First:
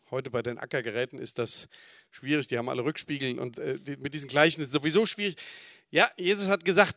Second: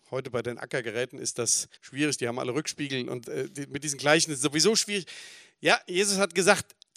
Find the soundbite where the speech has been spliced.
second; 1 cut; at 1.8 s

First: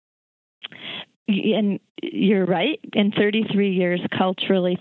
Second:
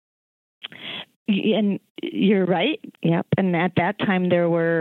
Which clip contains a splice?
second; 1 cut; at 2.9 s

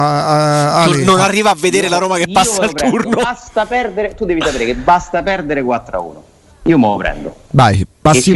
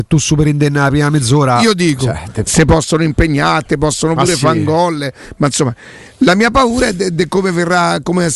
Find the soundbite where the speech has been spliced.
second; 1 cut; at 2.5 s

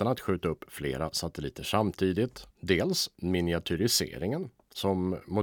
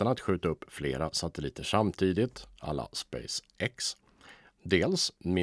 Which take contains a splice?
first; 1 cut; at 2.5 s

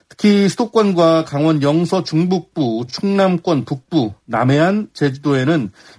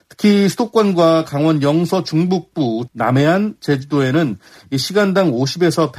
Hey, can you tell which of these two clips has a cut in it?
second; 1 cut; at 2.9 s

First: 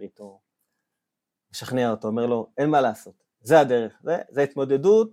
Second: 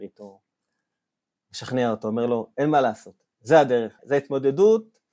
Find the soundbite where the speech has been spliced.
second; 1 cut; at 4.0 s

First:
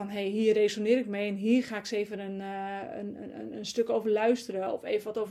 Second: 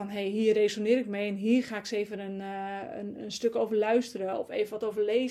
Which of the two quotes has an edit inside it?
second; 1 cut; at 3.2 s

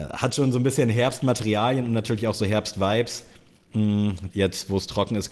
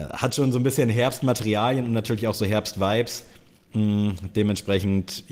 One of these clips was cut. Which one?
first; 1 cut; at 4.3 s

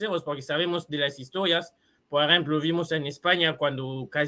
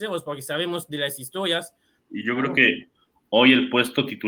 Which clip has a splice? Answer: second; 1 cut; at 2.1 s

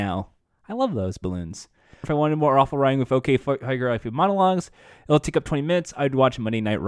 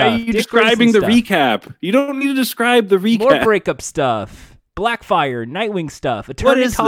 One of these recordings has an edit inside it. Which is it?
first; 1 cut; at 2.0 s

